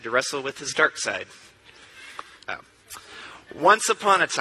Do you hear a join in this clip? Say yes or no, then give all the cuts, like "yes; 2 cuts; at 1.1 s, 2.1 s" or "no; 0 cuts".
yes; 1 cut; at 2.4 s